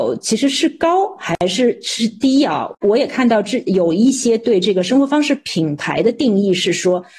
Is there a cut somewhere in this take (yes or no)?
yes